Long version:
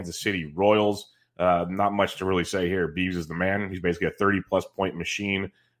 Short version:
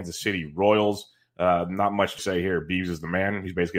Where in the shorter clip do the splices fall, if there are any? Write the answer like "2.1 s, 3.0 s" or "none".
2.2 s